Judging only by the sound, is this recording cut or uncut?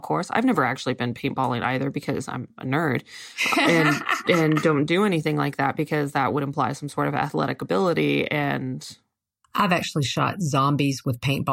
uncut